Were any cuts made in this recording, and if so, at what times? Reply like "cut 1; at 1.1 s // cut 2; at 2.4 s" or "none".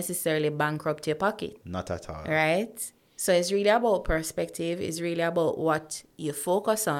cut 1; at 1.6 s